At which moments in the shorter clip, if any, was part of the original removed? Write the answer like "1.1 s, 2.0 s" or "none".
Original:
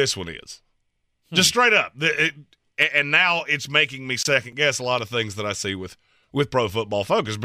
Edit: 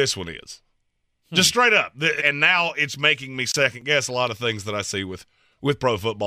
2.2 s

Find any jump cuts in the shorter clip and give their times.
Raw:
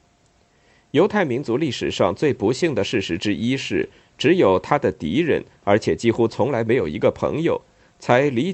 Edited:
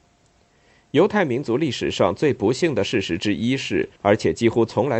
4.0 s

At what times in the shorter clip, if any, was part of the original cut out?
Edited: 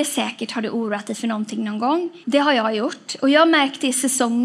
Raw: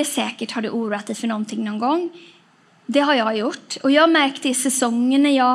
2.2 s

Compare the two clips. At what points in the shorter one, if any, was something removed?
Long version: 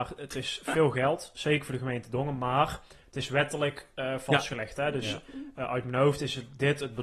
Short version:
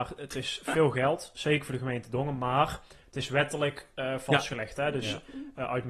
none

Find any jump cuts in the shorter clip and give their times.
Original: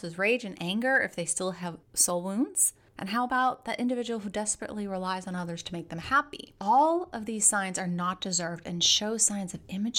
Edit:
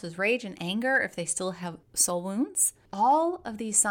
2.9 s

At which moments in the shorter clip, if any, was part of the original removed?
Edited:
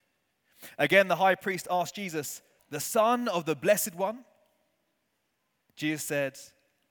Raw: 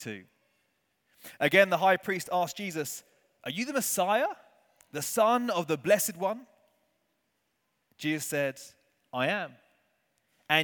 2.6 s

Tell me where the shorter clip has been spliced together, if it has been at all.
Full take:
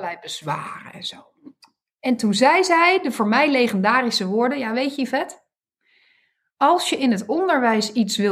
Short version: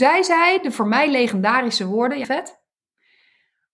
2.2 s

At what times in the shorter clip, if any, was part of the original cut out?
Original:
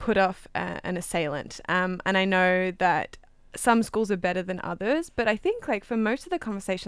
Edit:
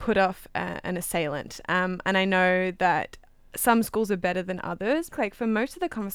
5.1 s

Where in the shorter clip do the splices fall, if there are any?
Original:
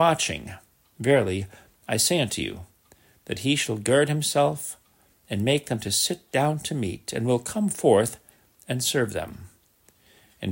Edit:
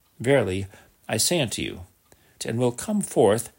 2.4 s

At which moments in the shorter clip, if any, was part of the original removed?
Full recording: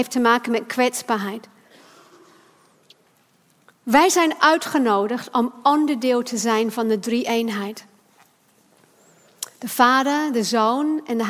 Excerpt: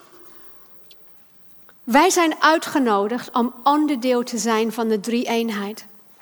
none

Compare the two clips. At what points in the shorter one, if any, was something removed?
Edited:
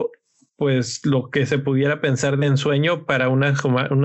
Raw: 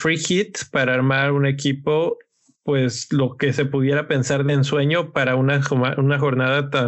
none

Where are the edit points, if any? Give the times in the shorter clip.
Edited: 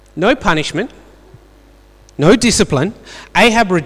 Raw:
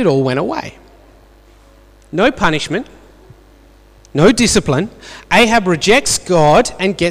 none

